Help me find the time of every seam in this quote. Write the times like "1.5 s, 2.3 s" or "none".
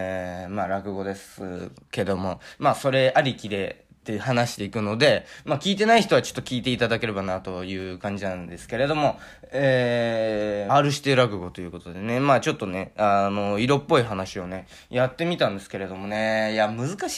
10.7 s

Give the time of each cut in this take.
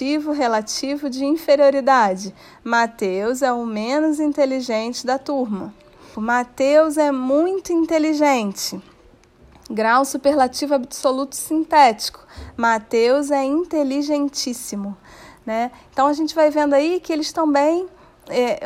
6.1 s

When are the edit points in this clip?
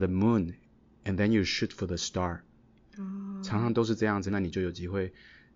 4.3 s

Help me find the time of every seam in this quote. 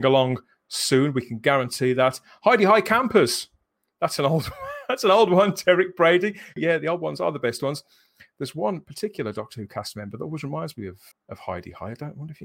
6.6 s, 11.1 s

